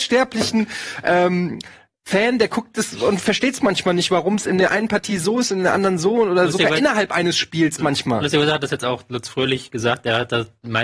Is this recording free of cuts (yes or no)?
yes